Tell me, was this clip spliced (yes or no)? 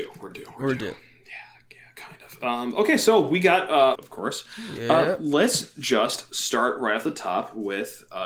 yes